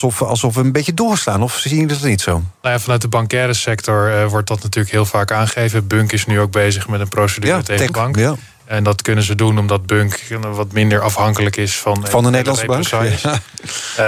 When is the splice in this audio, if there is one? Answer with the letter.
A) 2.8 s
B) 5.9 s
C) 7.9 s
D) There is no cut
C